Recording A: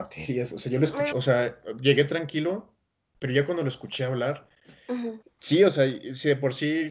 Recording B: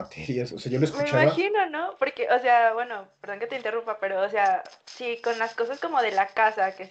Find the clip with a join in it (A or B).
A